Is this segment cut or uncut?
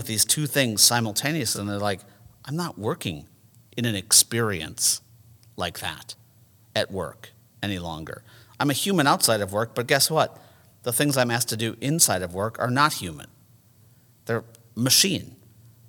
uncut